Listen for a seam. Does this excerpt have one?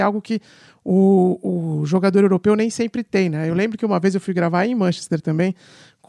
no; 0 cuts

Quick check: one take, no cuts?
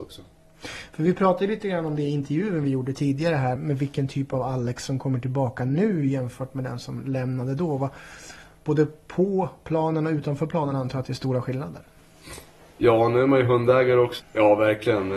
no; 2 cuts; at 3.6 s, 14.2 s

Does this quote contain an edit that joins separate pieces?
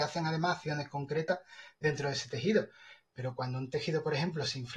no; 0 cuts

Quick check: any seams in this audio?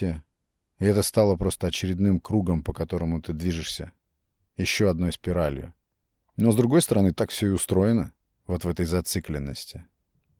yes; 1 cut; at 8.3 s

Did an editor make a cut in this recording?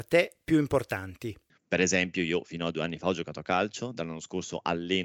yes; 1 cut; at 1.5 s

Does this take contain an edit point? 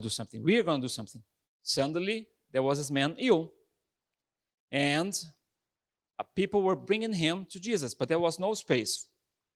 yes; 1 cut; at 1.4 s

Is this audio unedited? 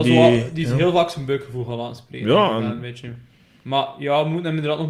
yes; 0 cuts

